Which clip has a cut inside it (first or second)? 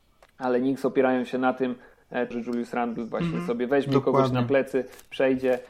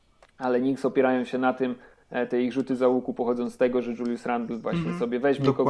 first